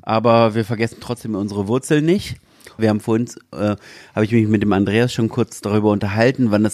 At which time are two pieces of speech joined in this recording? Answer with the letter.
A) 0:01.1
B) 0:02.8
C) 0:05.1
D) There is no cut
B